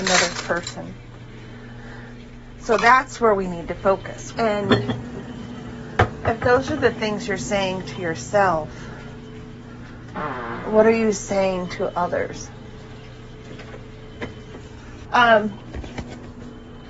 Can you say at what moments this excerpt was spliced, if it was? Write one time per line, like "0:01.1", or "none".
0:04.3
0:15.1